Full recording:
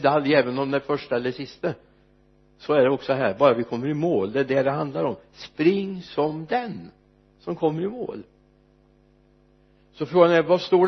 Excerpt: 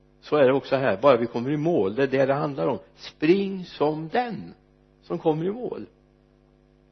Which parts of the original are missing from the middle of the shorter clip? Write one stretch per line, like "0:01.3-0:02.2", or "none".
none